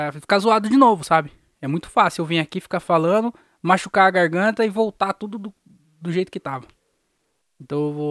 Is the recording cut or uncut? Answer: uncut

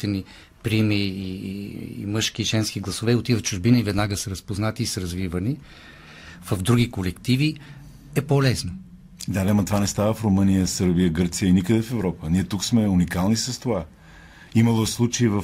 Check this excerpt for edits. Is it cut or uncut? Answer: uncut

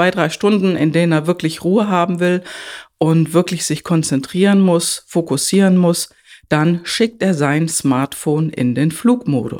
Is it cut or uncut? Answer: uncut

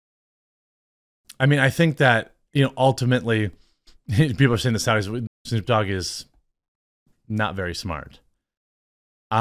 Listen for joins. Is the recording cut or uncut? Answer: cut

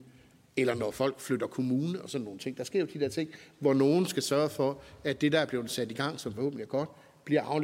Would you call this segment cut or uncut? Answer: uncut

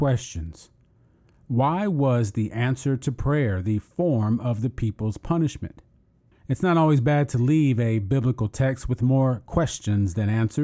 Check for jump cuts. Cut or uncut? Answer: cut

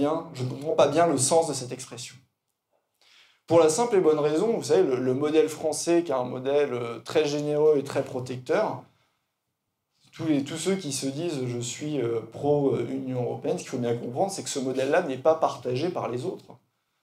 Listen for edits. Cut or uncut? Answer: uncut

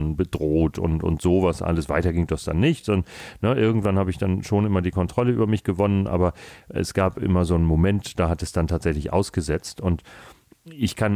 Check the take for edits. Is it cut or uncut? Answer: uncut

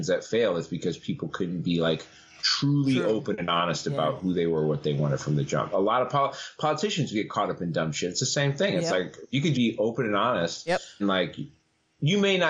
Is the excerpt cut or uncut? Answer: cut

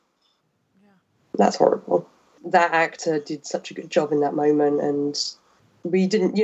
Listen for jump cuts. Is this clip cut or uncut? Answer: cut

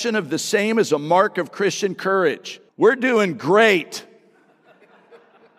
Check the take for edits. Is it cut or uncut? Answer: cut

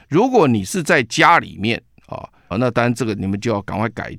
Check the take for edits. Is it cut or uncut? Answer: cut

